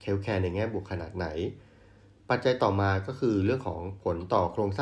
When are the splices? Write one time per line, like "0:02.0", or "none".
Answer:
none